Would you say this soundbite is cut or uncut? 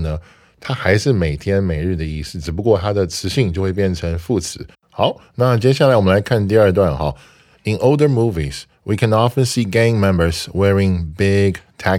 cut